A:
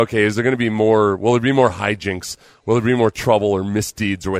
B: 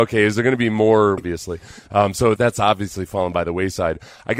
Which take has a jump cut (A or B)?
B